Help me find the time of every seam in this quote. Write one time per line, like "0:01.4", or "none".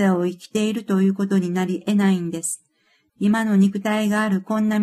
0:03.1